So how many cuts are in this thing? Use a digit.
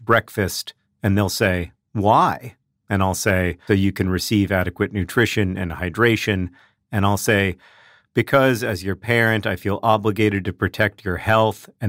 2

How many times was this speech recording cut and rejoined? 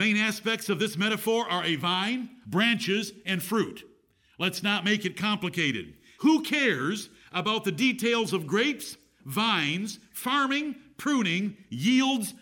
2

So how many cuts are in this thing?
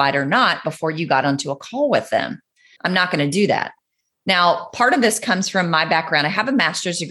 1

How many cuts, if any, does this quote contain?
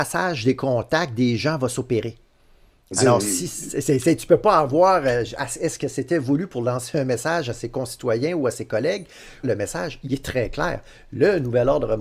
1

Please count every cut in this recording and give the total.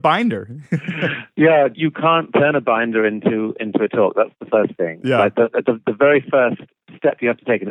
0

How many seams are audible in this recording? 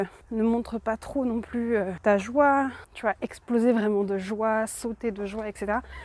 0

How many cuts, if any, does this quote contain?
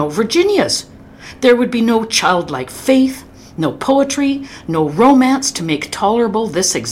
0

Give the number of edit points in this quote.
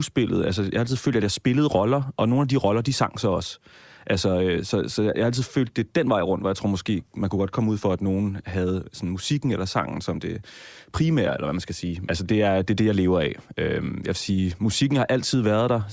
1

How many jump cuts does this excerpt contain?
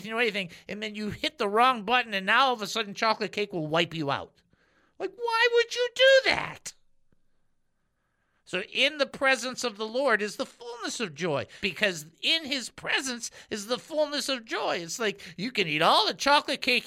1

